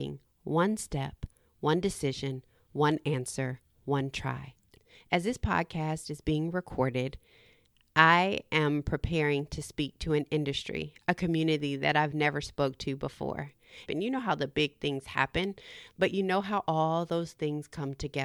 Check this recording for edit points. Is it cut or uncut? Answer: cut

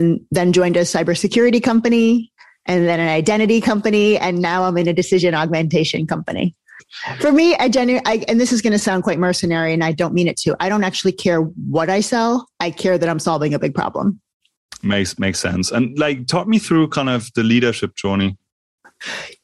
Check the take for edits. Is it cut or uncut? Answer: uncut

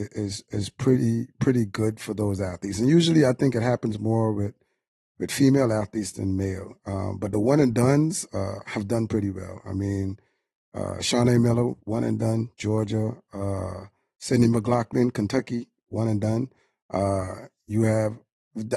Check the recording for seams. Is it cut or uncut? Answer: uncut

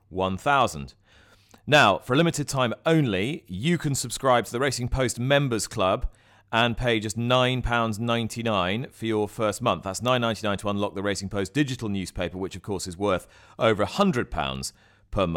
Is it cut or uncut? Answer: uncut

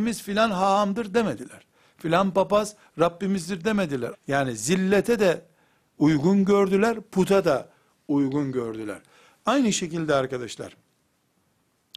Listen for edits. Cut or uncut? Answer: cut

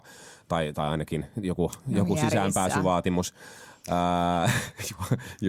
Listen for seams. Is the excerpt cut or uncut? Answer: uncut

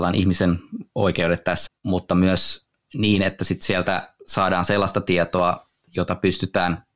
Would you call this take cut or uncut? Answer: cut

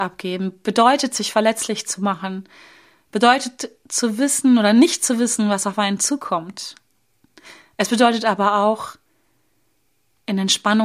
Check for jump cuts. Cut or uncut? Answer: uncut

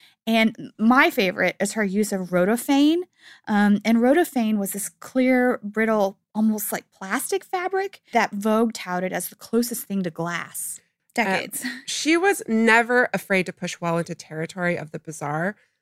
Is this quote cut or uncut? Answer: cut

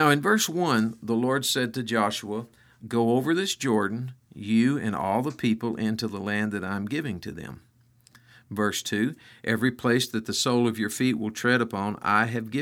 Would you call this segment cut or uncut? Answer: cut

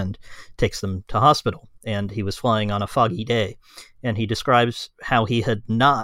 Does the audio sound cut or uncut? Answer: uncut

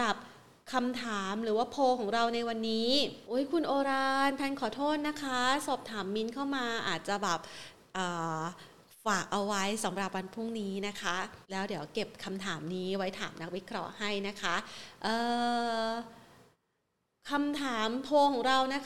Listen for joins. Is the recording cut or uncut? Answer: cut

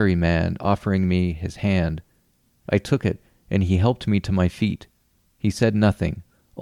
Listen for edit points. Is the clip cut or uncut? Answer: uncut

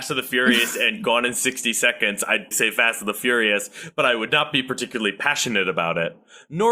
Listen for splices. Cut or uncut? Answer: cut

